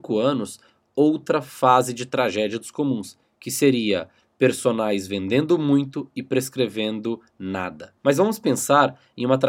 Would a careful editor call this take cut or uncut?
cut